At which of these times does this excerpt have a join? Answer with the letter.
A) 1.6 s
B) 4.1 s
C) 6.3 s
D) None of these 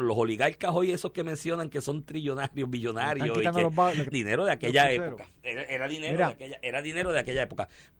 B